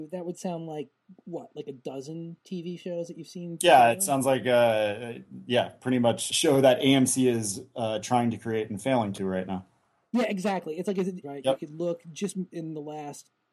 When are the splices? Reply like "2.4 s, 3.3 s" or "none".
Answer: 6.3 s, 11.2 s